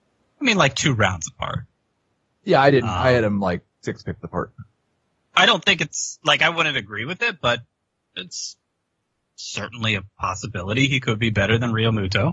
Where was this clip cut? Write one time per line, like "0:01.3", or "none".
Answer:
none